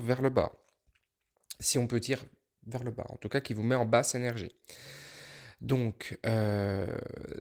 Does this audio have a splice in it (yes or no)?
no